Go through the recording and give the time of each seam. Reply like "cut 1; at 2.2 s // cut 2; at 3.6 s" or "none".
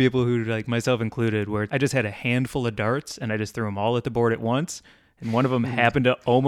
cut 1; at 1.7 s